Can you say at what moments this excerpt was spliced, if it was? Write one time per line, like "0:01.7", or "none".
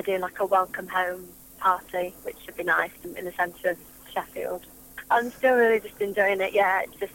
0:05.0